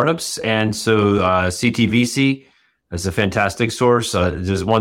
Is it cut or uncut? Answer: uncut